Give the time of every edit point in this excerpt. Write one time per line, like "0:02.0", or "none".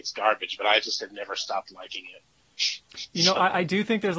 none